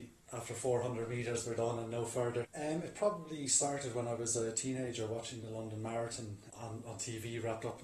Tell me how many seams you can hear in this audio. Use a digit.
2